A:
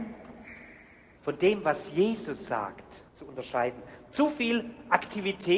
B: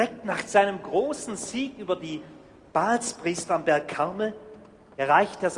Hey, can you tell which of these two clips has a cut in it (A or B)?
A